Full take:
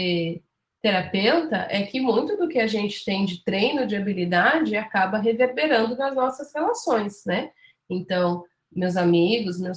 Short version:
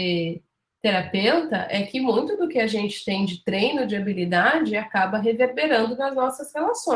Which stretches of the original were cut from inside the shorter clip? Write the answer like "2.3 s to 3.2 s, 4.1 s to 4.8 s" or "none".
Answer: none

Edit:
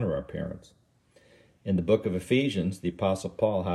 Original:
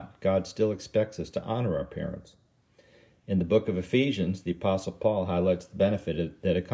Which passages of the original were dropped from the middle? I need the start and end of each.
none

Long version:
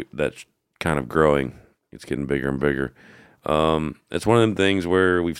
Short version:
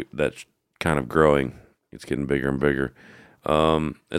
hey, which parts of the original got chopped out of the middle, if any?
none

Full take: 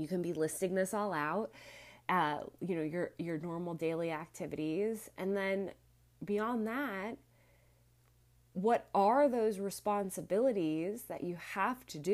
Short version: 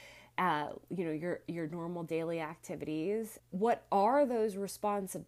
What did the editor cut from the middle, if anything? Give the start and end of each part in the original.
5.1 s to 8.4 s

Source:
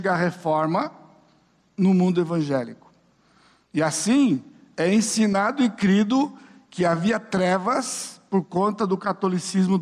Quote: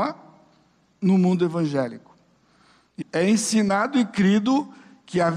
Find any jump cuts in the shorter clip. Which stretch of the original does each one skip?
3.8 s to 4.6 s

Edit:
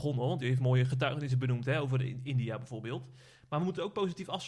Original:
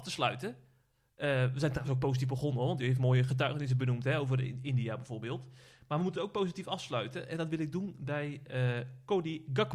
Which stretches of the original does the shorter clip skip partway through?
none

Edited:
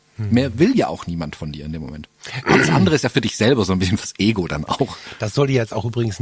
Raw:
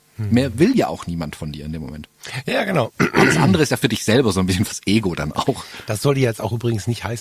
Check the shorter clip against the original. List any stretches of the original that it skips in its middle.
2.4 s to 3.1 s

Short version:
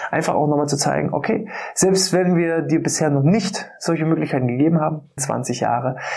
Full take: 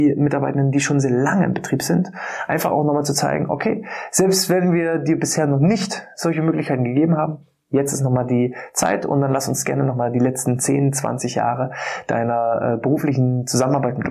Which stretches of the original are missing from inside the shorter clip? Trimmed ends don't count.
7.5 s to 10.9 s

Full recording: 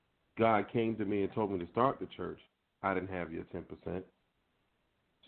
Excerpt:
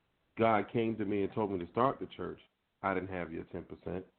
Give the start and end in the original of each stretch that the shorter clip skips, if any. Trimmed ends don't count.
none

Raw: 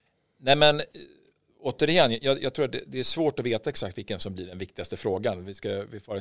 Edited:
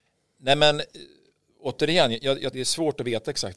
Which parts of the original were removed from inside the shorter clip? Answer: 2.5 s to 2.9 s

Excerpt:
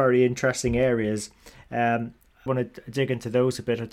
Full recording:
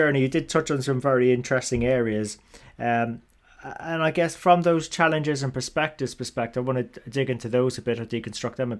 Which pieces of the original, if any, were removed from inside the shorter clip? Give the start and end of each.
3.5 s to 6.7 s

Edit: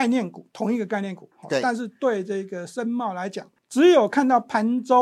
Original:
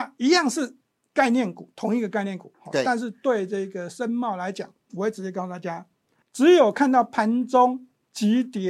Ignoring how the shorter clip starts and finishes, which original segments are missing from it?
4.8 s to 6.2 s

